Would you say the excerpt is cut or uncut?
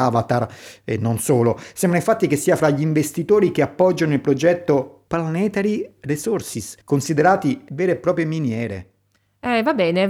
cut